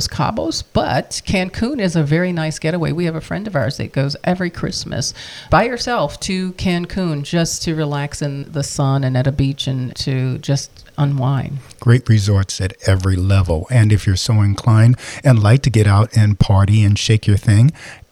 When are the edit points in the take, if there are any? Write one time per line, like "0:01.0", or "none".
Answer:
none